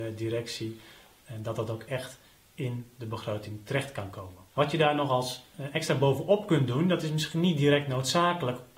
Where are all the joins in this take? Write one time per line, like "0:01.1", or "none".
0:04.5